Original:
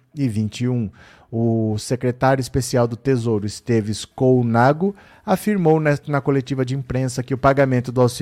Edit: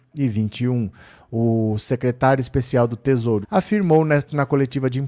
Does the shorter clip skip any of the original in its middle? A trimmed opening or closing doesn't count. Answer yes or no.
yes